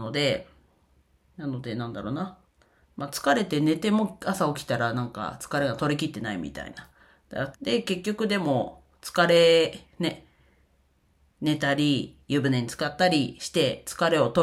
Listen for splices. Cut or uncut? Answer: cut